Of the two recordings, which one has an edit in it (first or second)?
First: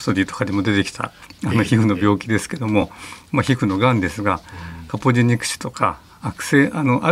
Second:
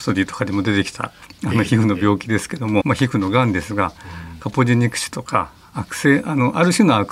second